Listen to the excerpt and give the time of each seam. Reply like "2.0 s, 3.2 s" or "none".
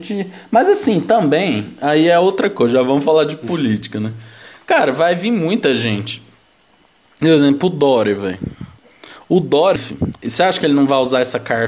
9.8 s